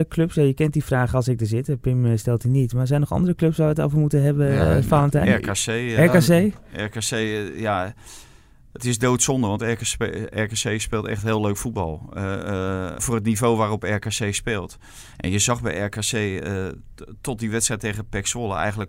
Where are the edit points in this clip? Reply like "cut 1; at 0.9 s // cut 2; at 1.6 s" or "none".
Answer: cut 1; at 13.0 s // cut 2; at 15.1 s